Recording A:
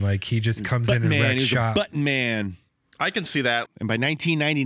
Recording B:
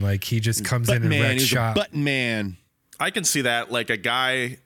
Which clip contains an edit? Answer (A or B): A